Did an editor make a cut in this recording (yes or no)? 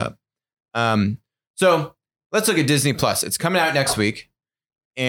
no